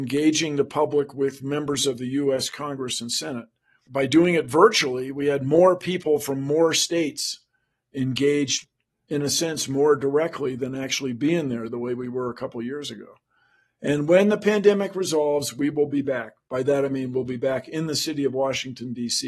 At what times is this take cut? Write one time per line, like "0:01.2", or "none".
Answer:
none